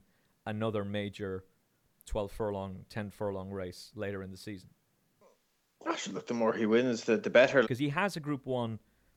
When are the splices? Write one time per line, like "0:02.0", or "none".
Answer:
0:07.6